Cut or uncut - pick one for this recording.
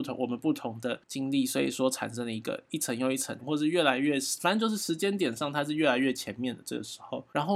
cut